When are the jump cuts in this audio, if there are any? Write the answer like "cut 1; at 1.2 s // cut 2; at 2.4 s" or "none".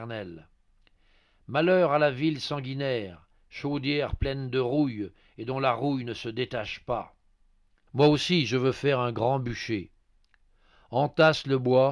cut 1; at 7.9 s